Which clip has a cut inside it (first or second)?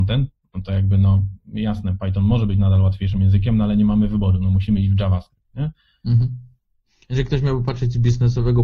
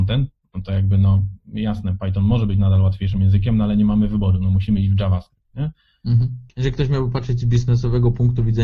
second